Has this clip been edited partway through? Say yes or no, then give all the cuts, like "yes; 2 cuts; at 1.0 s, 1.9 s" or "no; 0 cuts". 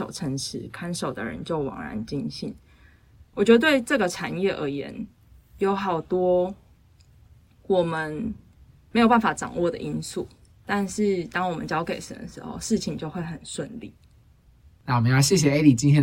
no; 0 cuts